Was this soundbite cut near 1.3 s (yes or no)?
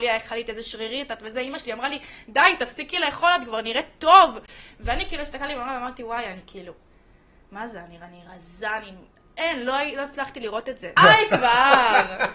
no